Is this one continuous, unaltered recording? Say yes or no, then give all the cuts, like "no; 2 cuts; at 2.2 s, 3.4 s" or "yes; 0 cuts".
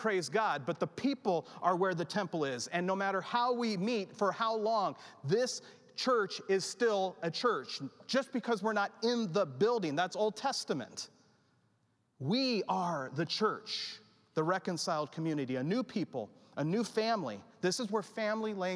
yes; 0 cuts